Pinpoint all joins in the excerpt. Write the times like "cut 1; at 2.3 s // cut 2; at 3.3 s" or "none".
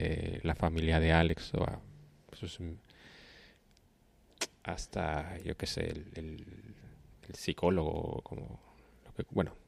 none